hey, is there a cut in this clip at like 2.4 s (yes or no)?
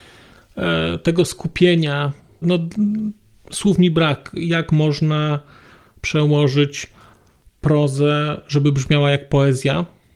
yes